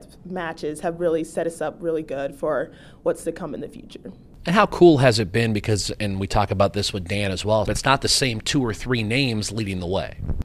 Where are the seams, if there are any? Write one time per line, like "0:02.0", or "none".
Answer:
0:07.6